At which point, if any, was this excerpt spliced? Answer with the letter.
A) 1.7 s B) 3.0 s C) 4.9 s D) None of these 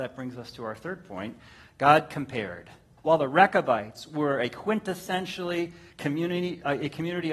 B